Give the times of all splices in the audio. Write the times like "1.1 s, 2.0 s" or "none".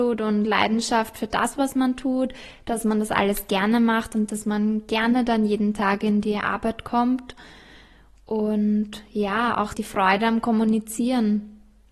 9.7 s